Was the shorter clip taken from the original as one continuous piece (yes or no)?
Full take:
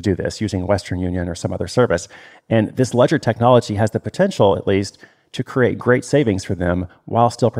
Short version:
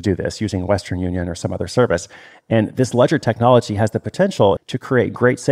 no